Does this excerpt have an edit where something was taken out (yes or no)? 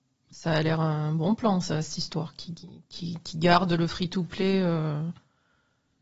no